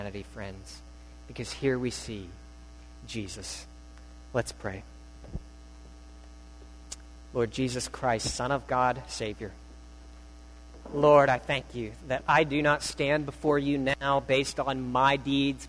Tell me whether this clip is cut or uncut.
uncut